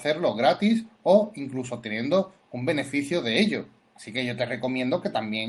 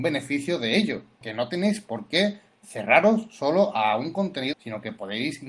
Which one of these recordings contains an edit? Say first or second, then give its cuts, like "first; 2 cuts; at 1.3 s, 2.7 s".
second; 2 cuts; at 1.2 s, 4.5 s